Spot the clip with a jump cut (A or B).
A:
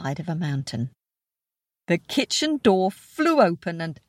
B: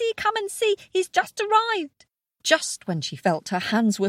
B